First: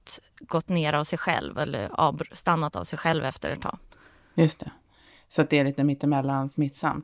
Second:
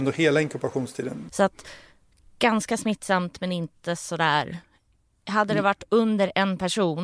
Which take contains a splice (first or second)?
second